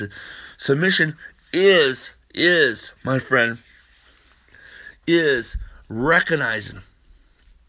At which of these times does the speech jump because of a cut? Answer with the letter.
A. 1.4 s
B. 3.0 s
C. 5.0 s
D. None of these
D